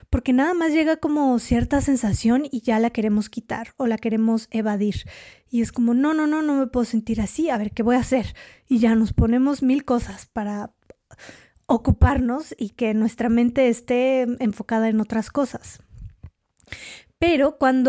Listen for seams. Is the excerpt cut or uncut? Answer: uncut